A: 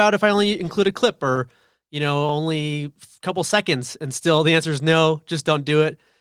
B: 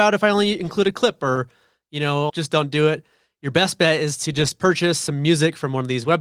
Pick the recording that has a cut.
B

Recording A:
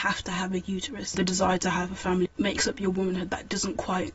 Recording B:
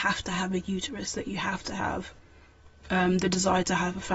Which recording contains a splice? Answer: A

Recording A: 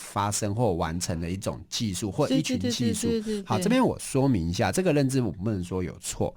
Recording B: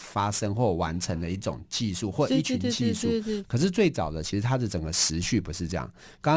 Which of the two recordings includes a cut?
B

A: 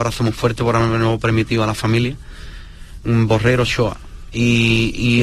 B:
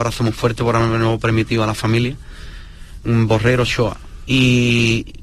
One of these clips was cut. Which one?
B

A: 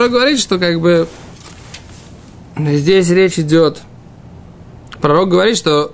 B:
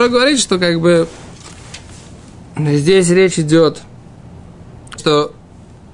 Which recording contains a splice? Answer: B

